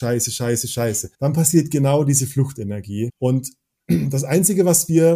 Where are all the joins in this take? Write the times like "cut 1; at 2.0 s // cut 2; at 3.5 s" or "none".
cut 1; at 1.1 s // cut 2; at 3.1 s